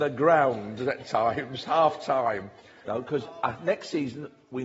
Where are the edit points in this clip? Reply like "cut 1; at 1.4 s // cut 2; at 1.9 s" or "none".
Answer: cut 1; at 2.8 s